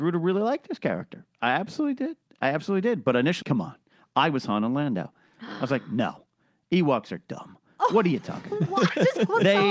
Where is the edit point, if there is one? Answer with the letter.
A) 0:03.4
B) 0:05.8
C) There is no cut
A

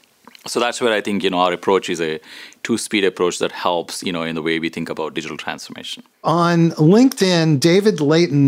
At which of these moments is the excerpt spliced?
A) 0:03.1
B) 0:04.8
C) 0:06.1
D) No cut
C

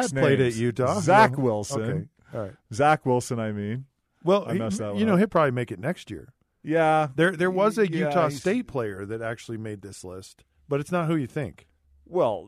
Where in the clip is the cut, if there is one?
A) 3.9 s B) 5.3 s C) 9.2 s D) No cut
D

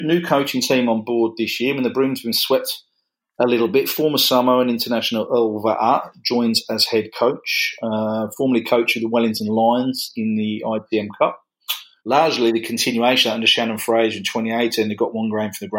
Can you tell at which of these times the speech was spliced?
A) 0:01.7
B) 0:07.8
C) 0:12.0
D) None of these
C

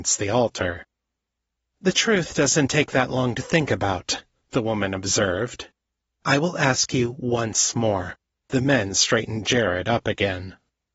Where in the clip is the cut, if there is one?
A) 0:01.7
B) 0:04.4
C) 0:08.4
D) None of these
C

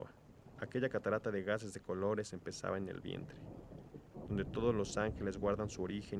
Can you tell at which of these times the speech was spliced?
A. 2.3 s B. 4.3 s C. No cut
B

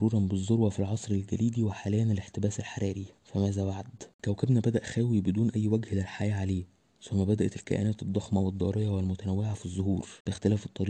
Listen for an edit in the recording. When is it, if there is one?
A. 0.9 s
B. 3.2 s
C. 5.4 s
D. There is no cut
B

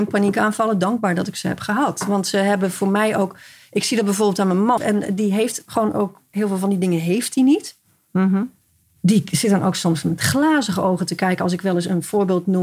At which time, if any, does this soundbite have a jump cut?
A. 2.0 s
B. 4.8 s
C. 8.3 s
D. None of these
B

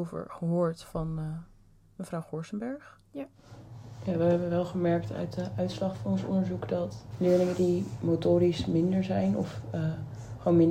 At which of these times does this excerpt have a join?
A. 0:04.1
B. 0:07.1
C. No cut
B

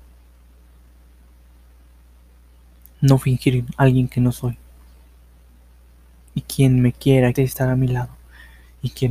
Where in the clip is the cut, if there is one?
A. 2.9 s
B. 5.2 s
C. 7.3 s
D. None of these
C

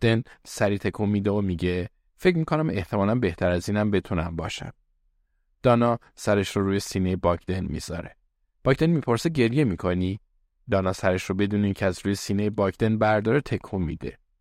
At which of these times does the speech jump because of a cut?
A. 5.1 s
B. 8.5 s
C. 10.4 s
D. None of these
D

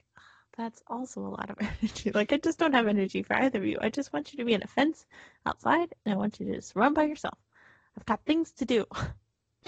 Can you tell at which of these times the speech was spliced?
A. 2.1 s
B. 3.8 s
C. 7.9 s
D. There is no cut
D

